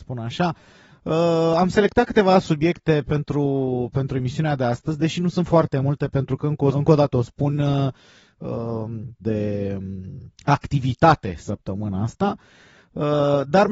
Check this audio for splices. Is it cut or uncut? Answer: cut